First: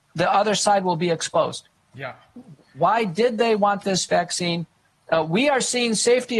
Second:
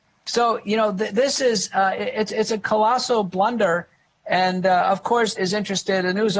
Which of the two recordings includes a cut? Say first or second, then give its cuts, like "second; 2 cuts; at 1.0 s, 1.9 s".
second; 1 cut; at 5.4 s